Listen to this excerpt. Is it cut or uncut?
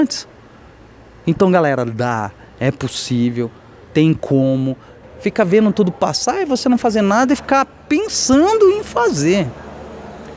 cut